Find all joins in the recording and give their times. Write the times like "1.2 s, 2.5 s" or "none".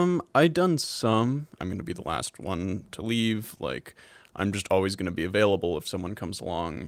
1.6 s

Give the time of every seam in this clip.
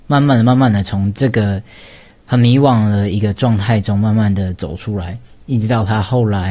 none

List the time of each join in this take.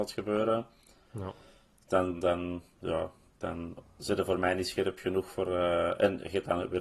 none

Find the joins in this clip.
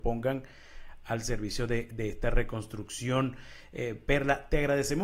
none

